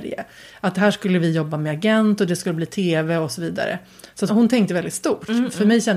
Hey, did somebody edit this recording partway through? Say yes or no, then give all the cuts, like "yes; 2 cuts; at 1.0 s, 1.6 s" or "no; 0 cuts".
yes; 1 cut; at 4.3 s